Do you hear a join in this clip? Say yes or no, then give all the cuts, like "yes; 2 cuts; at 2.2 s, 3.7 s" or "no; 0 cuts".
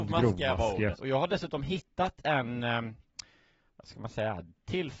yes; 1 cut; at 0.9 s